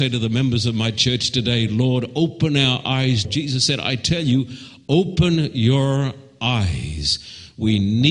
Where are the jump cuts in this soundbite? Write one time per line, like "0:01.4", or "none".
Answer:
0:03.2